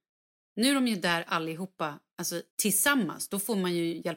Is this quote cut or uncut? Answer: cut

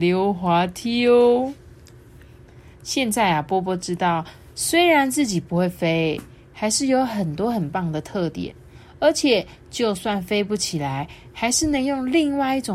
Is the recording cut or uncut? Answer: uncut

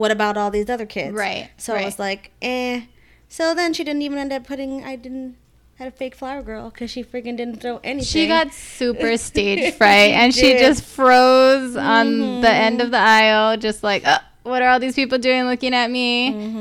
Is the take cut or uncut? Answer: uncut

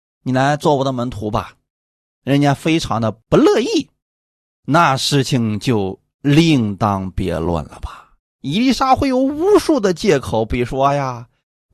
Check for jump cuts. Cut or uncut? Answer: uncut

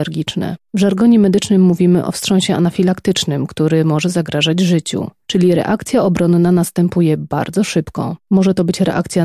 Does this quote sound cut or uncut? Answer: uncut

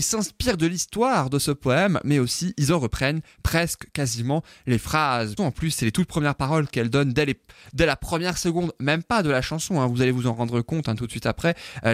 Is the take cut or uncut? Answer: cut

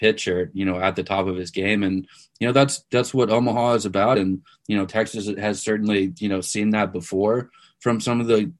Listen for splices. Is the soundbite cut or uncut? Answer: uncut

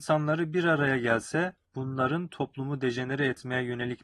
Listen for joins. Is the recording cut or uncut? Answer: cut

